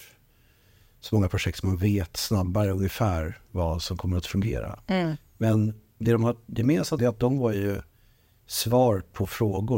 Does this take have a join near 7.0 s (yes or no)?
yes